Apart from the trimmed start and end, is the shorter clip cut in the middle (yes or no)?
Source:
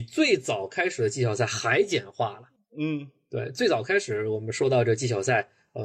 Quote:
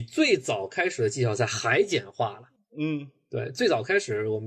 no